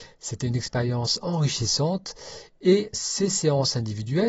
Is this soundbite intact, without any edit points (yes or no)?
no